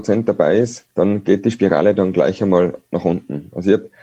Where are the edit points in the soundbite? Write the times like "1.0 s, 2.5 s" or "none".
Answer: 0.9 s